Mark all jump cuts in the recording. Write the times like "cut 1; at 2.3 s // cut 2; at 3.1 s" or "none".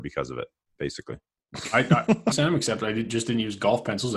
cut 1; at 2.3 s